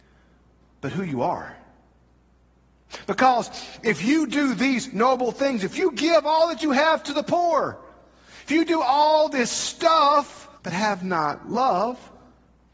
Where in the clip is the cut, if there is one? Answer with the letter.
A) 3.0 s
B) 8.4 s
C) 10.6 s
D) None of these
C